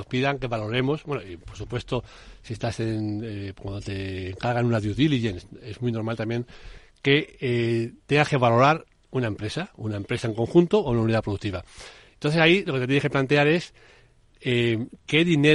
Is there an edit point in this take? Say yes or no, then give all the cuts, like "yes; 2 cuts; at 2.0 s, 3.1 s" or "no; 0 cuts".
no; 0 cuts